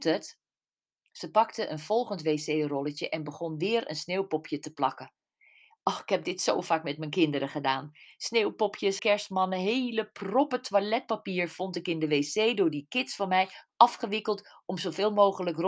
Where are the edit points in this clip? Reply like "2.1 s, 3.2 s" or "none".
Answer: 9.0 s